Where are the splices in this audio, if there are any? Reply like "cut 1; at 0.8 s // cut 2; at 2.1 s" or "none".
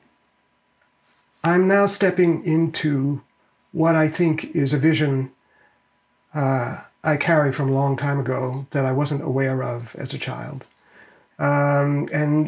cut 1; at 11.3 s